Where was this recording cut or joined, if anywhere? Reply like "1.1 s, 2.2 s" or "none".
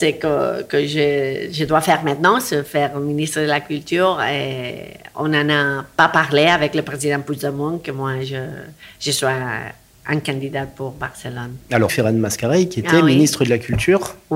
11.9 s